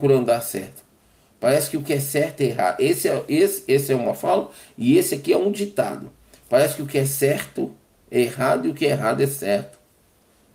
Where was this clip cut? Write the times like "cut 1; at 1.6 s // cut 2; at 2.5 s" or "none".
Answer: none